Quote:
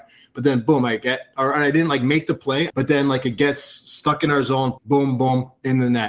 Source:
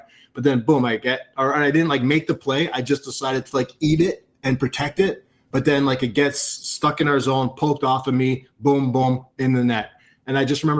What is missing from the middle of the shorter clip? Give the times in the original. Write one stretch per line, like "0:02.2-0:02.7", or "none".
0:02.7-0:05.5
0:07.5-0:08.5